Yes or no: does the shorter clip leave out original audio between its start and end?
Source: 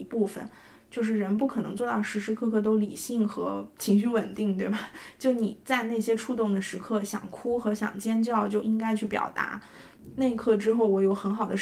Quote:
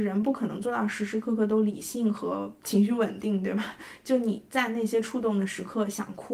no